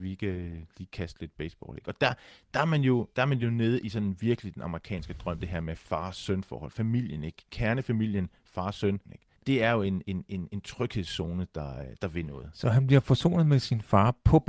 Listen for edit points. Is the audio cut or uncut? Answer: cut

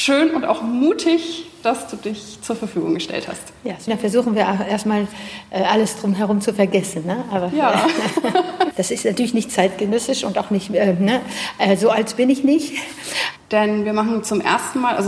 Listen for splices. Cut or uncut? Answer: cut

